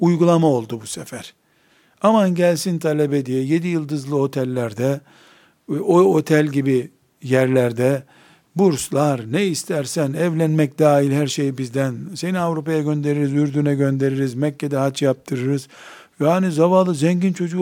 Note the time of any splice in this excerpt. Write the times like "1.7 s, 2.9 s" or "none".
none